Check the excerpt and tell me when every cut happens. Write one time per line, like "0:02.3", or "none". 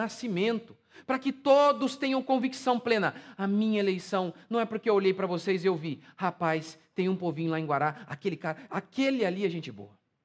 none